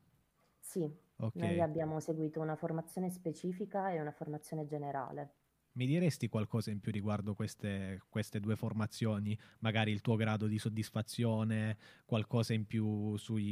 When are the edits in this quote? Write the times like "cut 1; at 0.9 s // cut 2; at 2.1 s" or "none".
none